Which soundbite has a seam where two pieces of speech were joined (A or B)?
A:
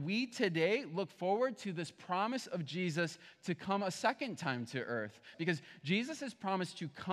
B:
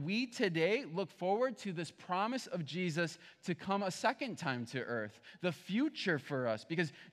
A